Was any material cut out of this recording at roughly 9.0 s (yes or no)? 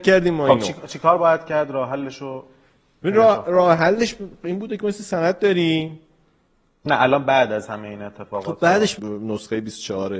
yes